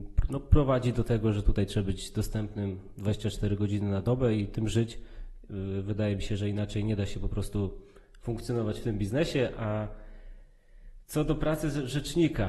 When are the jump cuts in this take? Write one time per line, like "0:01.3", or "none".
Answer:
none